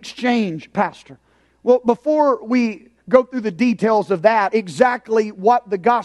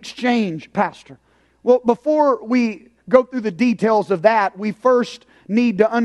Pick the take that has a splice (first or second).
first